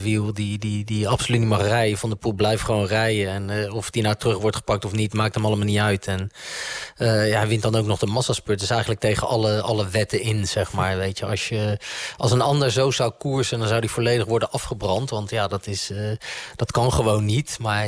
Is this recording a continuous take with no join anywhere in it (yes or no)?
yes